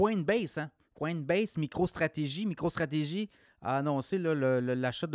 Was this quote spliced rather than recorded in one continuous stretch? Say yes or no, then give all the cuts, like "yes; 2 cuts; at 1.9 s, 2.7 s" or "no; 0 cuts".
no; 0 cuts